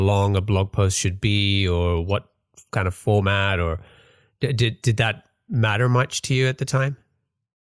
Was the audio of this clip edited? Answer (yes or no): no